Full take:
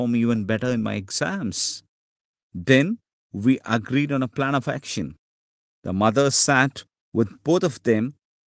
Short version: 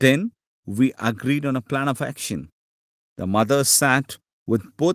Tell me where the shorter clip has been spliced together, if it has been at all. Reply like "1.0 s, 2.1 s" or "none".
none

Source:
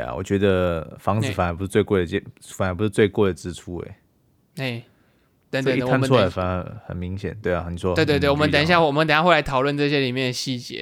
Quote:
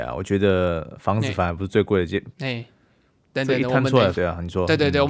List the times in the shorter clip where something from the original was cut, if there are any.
2.3 s, 4.1 s

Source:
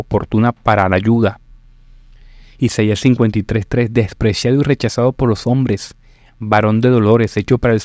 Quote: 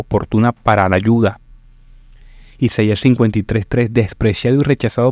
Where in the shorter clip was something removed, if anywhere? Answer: none

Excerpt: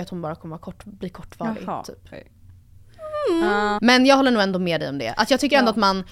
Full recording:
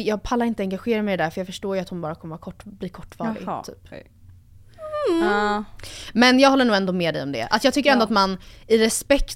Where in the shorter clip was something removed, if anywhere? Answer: 3.8 s

